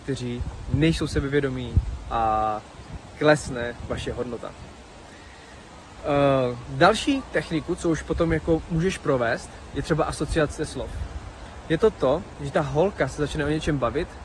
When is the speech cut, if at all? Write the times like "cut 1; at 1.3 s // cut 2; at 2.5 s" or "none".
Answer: none